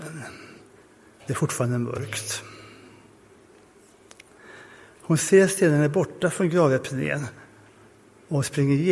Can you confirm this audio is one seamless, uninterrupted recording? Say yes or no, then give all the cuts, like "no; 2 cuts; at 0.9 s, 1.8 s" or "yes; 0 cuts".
yes; 0 cuts